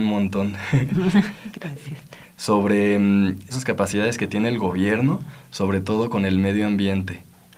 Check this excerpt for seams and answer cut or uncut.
cut